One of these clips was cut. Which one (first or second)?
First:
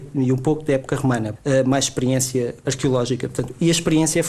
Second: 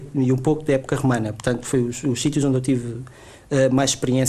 first